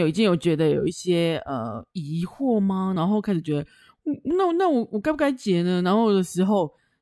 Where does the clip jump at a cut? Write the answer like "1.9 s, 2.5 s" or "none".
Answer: none